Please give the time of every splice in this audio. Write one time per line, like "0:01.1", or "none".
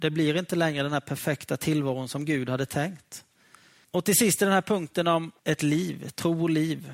0:03.8
0:05.4